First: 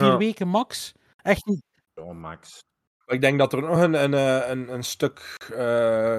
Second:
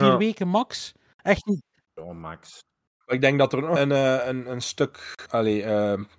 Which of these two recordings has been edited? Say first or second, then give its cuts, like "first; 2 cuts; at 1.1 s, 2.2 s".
second; 2 cuts; at 3.8 s, 5.3 s